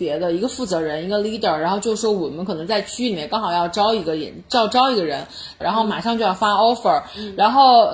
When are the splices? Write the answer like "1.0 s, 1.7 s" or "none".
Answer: 5.6 s